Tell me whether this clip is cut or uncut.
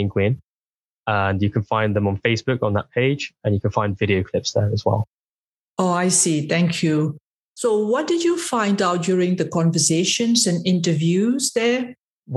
uncut